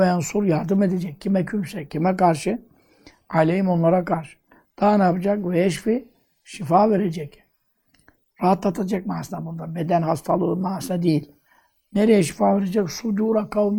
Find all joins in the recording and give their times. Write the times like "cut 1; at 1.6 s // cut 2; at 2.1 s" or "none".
none

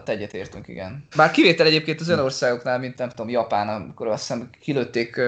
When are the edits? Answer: cut 1; at 1.1 s

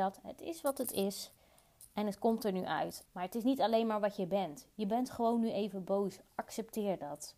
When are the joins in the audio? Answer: cut 1; at 3.1 s

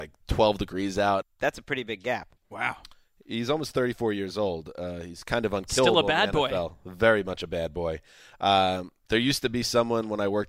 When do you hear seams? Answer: cut 1; at 1.2 s

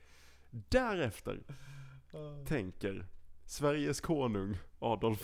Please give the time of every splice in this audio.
none

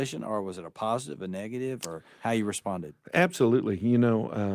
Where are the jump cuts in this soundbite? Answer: none

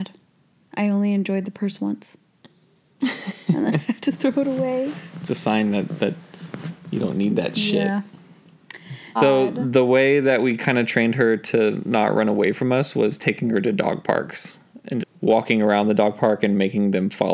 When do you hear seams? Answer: cut 1; at 9.2 s // cut 2; at 15.0 s

